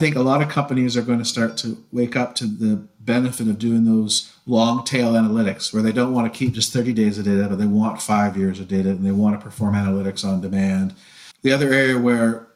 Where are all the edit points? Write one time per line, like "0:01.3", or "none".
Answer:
0:11.3